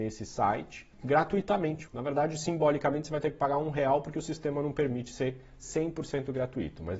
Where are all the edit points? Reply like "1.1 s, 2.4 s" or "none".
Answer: 1.9 s